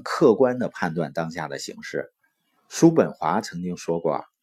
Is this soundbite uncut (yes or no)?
no